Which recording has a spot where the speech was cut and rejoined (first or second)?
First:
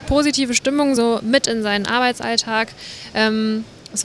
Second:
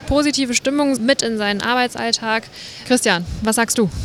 second